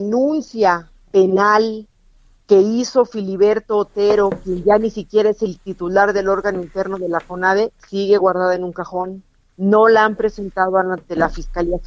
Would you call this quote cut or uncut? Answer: uncut